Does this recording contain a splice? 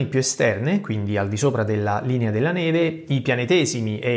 no; 0 cuts

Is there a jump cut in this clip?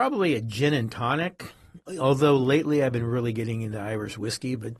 no; 0 cuts

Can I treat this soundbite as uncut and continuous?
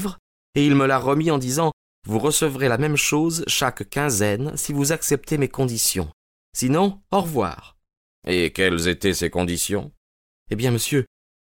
yes; 0 cuts

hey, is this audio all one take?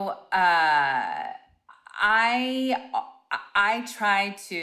yes; 0 cuts

